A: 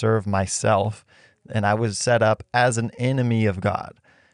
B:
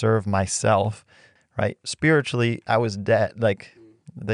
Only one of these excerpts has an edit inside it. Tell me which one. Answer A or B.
B